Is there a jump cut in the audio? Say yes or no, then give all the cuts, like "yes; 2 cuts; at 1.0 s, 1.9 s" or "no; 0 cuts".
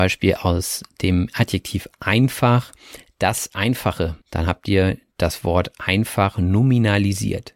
yes; 1 cut; at 4.2 s